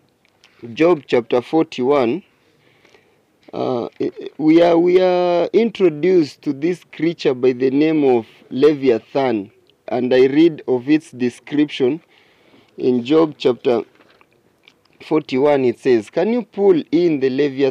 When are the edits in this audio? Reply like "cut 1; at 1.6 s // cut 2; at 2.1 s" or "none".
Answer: cut 1; at 9.9 s